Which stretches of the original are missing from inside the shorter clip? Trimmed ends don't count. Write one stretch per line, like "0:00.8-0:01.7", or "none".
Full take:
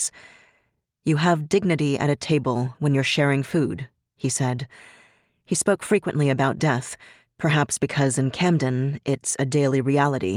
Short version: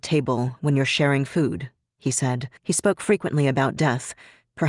0:04.7-0:05.4